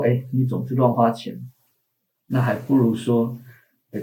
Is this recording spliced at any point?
no; 0 cuts

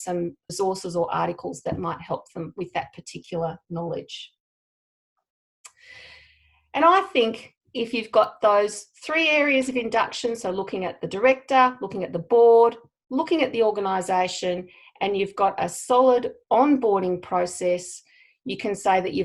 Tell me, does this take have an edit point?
no; 0 cuts

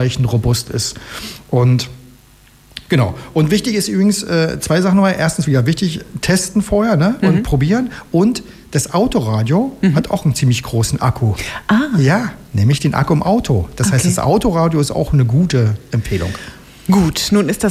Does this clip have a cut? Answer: no; 0 cuts

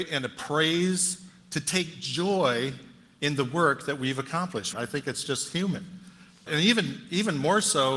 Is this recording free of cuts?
no; 2 cuts; at 4.7 s, 6.5 s

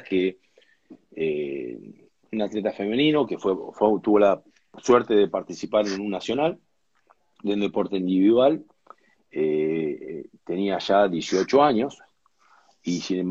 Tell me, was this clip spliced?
no; 0 cuts

